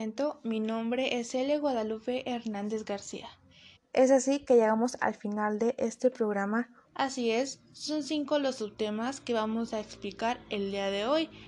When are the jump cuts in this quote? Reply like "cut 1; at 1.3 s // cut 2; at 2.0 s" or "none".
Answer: cut 1; at 3.8 s // cut 2; at 6.8 s